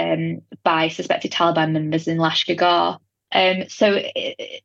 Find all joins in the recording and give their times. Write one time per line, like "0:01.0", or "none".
0:03.3